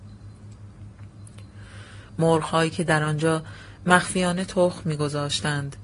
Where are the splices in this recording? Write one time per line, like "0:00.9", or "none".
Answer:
0:02.1